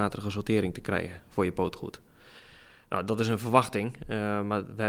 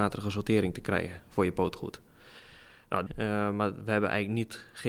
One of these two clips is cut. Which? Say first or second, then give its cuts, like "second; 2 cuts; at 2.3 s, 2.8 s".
second; 1 cut; at 3.1 s